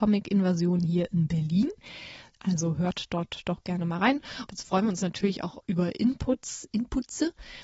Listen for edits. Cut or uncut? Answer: cut